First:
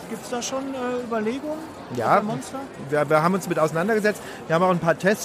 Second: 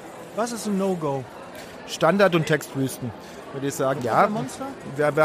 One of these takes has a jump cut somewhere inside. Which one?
second; 1 cut; at 4.0 s

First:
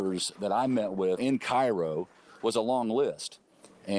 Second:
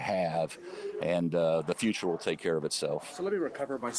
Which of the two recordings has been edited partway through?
first; 1 cut; at 1.2 s

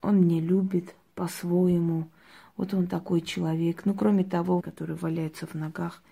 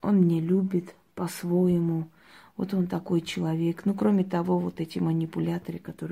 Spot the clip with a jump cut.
first; 1 cut; at 4.6 s

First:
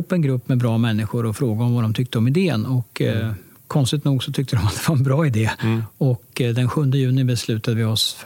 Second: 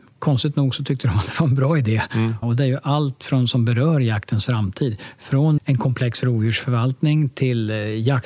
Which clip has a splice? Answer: second; 2 cuts; at 2.4 s, 5.6 s

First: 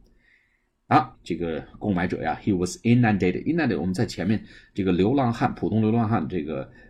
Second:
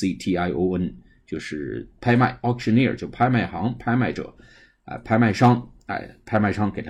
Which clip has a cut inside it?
first; 1 cut; at 1.1 s

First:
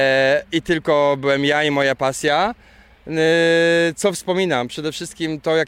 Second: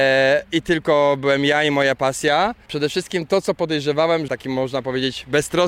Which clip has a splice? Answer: second; 2 cuts; at 2.7 s, 4.3 s

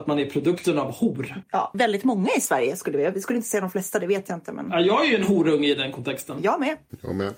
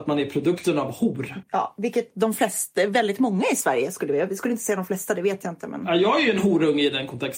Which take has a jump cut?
first; 1 cut; at 1.7 s

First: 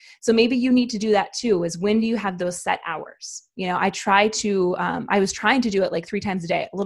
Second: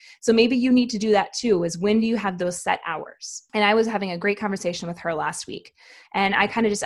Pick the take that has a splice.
second; 1 cut; at 3.5 s

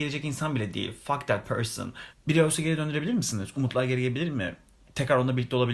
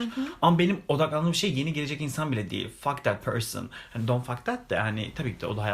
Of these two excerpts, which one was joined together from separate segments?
first; 1 cut; at 2.1 s

